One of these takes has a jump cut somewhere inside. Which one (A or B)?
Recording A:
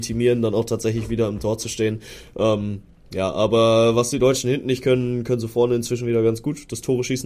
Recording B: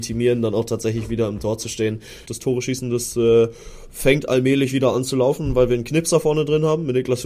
B